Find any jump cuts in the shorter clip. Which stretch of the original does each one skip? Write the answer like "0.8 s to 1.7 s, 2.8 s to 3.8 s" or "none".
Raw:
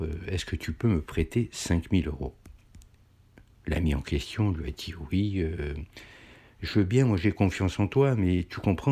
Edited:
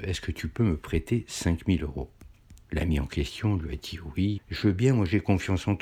2.9 s to 3.6 s, 5.3 s to 6.5 s